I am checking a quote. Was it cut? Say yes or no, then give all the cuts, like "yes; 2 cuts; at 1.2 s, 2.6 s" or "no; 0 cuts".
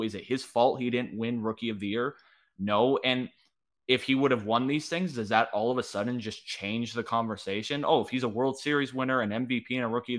no; 0 cuts